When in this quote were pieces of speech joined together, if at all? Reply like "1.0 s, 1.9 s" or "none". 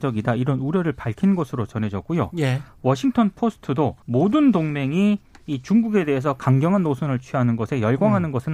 4.0 s